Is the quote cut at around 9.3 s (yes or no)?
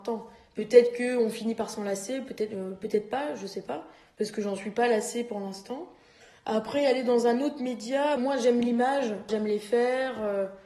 yes